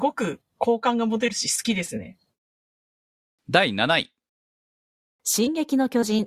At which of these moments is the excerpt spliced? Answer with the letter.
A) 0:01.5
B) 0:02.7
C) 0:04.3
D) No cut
D